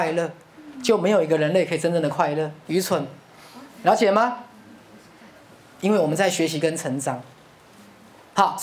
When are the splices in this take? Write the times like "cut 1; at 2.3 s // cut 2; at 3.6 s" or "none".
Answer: cut 1; at 2.6 s